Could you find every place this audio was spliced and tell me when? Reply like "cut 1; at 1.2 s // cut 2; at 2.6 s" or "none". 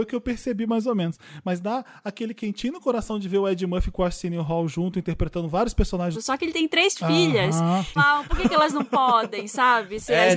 cut 1; at 6.1 s // cut 2; at 8.0 s